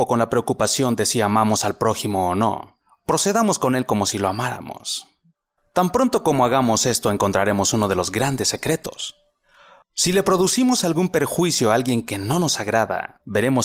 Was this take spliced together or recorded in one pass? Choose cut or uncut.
cut